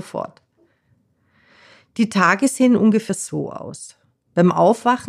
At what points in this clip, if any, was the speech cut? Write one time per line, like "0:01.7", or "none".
none